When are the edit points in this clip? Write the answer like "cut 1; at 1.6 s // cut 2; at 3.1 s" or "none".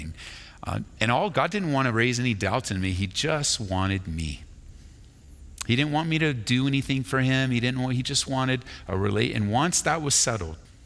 cut 1; at 1.3 s